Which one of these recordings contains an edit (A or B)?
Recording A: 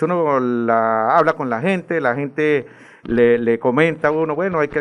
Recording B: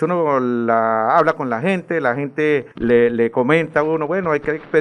B